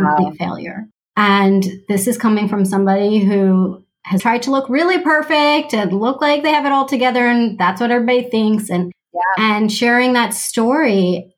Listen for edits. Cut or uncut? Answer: cut